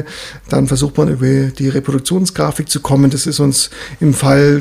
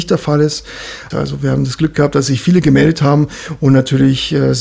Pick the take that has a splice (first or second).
second